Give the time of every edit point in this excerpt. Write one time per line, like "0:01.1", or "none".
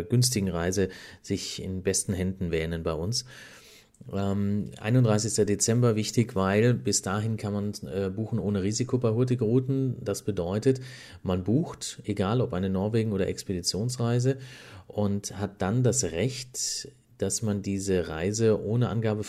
none